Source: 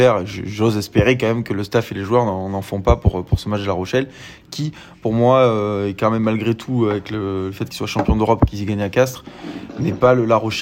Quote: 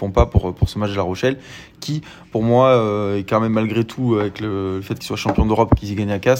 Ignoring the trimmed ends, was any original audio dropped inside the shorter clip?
no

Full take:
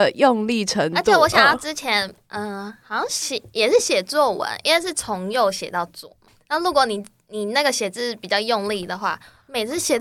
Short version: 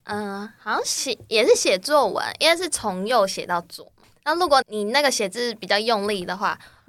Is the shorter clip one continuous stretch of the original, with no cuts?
no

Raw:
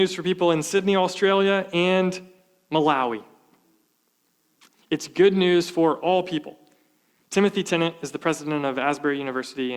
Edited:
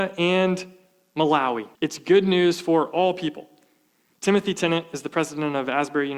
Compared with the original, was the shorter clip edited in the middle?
yes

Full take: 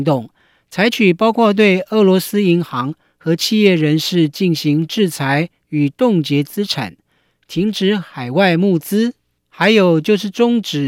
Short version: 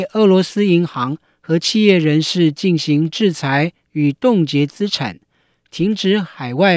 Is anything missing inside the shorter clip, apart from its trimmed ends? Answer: no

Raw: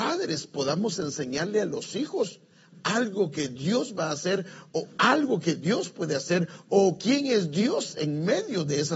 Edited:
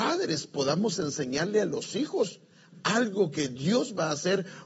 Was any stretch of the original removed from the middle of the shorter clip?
no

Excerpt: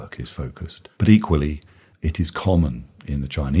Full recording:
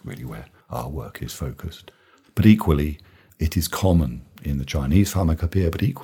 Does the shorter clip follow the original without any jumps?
no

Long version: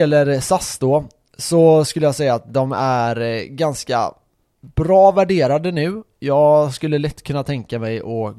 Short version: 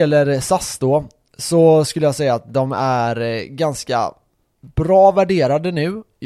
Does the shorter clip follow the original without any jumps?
yes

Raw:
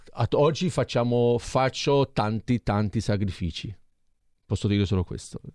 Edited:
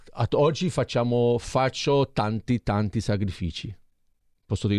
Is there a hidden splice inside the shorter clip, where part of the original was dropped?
no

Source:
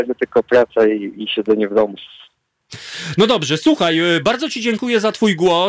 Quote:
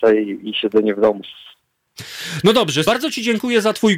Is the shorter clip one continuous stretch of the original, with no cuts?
no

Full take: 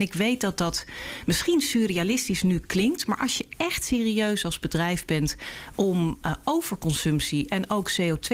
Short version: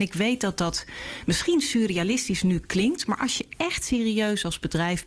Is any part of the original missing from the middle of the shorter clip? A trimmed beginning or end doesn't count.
no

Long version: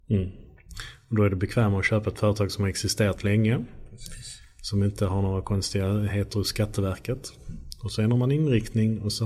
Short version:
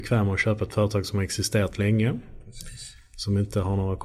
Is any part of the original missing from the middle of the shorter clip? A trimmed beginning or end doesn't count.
no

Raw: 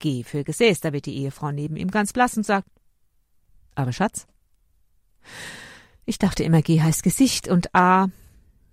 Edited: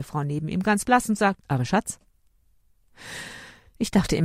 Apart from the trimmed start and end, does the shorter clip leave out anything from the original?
yes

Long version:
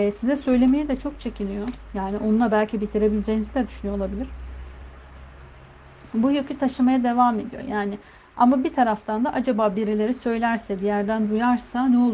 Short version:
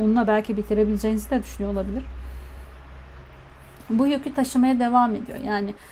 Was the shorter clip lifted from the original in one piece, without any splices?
yes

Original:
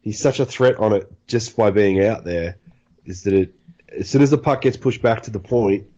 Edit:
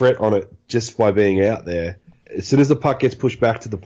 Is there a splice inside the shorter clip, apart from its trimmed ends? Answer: yes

